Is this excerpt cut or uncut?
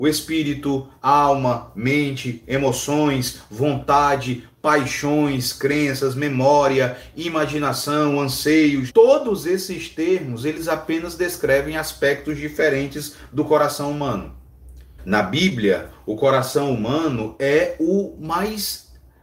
cut